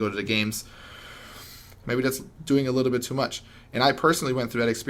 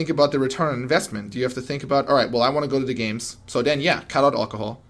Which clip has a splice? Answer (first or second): first